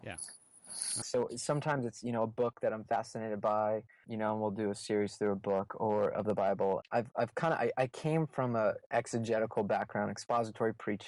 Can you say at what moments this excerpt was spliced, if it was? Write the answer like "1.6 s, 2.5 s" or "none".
1.0 s, 4.0 s, 6.8 s